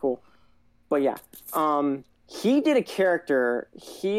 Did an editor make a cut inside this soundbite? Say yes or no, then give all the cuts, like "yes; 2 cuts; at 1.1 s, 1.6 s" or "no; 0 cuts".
no; 0 cuts